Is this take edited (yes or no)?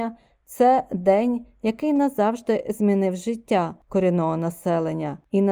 no